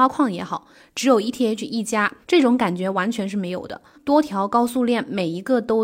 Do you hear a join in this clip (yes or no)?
yes